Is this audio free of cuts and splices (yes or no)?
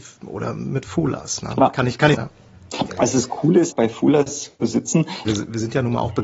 no